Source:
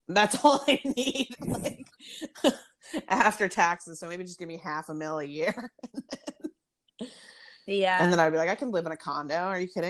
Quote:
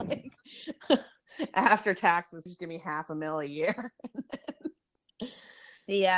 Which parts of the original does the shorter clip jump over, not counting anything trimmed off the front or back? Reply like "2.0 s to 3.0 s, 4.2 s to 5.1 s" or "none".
4.0 s to 4.2 s